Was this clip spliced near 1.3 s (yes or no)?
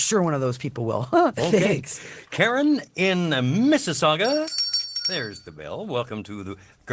yes